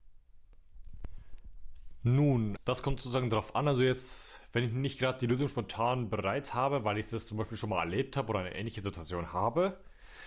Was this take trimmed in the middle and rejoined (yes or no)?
yes